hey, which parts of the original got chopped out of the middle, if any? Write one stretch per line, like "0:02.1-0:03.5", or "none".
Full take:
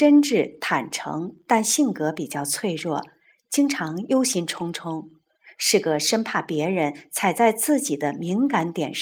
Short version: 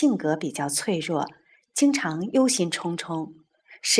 none